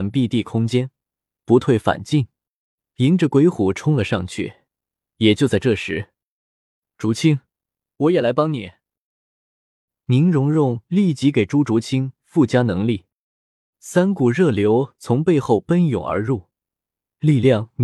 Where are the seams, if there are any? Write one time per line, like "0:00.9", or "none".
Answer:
none